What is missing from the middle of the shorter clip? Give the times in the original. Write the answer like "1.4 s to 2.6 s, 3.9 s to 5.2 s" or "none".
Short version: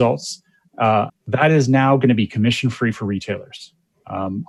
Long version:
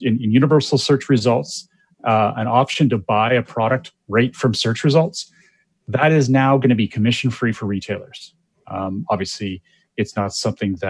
2.3 s to 5.7 s